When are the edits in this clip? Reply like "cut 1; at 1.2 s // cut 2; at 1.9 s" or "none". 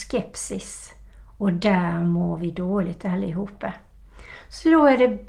none